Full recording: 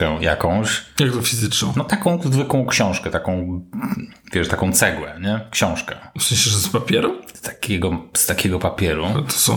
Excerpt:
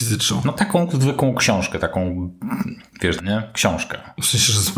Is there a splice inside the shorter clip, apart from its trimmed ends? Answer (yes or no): yes